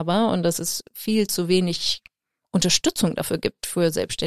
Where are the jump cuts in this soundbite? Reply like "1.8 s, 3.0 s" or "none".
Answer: none